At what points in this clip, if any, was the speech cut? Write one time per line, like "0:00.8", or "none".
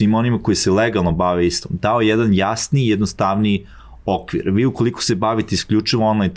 none